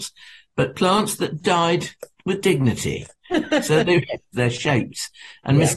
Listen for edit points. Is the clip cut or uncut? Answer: cut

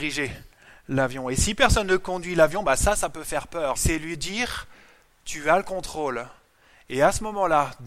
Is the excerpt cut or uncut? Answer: cut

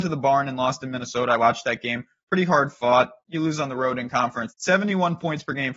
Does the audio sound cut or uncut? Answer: cut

